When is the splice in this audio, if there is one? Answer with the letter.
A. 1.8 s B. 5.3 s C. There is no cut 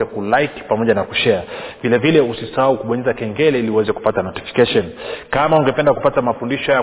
C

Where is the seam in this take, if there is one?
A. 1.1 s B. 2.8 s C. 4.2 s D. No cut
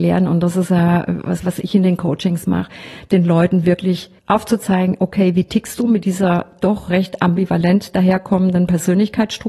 C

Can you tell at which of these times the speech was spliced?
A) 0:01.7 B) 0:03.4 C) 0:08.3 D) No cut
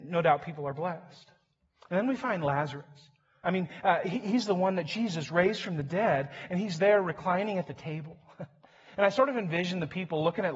B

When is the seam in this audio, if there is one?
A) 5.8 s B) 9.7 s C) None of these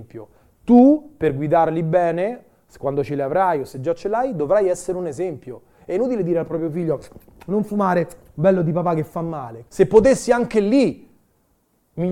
B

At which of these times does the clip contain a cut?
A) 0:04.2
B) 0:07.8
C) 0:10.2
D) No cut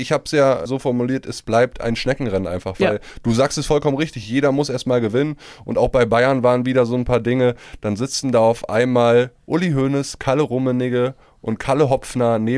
D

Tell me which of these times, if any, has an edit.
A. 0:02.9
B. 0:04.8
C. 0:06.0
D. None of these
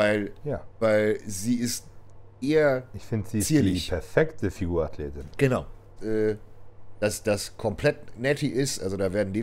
C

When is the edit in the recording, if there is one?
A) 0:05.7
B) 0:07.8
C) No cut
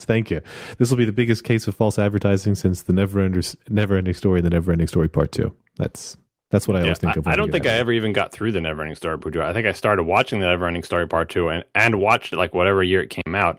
C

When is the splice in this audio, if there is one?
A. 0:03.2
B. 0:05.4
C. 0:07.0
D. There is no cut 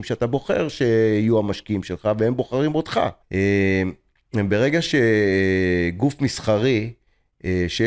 A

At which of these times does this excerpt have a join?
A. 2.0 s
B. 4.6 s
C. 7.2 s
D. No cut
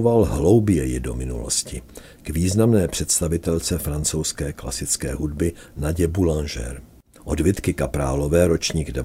C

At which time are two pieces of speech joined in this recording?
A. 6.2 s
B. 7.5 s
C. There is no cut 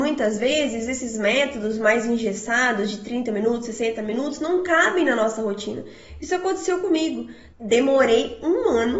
B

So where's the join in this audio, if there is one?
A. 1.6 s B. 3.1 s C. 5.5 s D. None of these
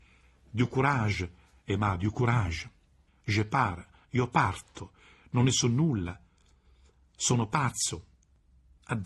B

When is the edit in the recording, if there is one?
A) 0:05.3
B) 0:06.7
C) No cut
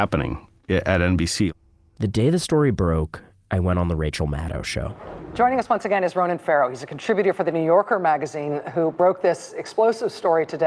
C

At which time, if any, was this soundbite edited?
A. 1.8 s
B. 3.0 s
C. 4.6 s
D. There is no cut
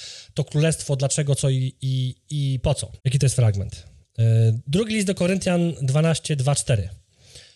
B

